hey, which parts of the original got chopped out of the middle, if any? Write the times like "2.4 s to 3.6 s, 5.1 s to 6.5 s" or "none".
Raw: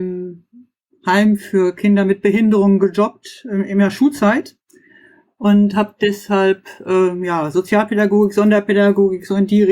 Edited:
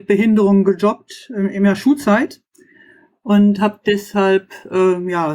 none